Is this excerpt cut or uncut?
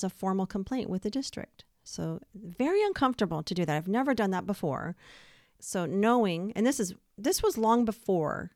cut